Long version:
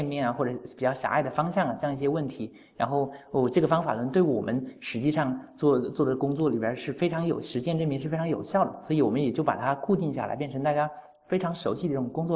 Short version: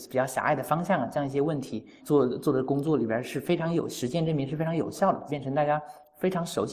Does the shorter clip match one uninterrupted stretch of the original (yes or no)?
no